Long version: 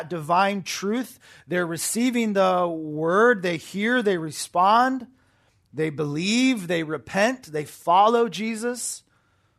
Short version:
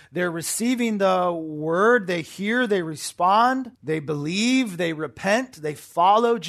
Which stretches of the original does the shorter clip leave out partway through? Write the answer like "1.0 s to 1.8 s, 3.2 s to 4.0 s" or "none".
5.1 s to 5.7 s